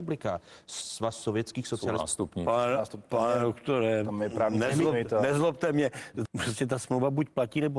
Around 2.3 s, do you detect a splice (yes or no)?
no